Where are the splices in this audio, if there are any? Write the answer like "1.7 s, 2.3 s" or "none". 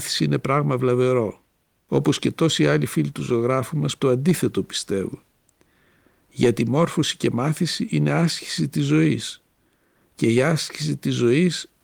4.0 s